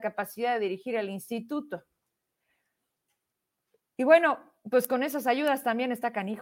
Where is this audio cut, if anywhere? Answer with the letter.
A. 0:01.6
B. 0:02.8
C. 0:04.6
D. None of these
D